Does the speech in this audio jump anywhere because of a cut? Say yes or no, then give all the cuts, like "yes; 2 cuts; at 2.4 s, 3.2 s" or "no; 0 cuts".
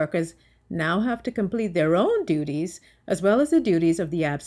no; 0 cuts